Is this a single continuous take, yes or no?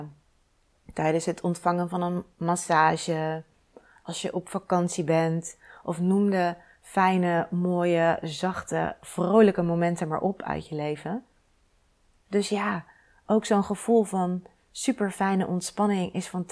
no